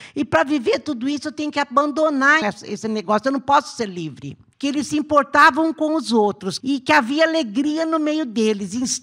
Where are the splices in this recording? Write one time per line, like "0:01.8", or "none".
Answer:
0:02.4
0:04.5
0:06.6